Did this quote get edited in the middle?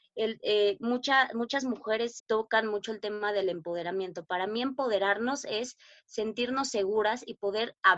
yes; 1 cut; at 2.2 s

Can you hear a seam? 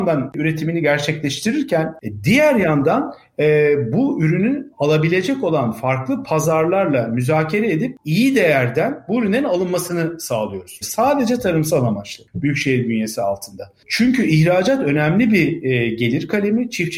yes; 1 cut; at 10.8 s

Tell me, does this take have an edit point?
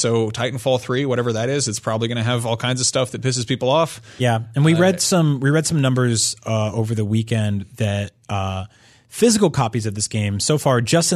no; 0 cuts

